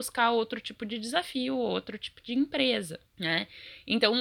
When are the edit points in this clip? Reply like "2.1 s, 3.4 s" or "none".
3.1 s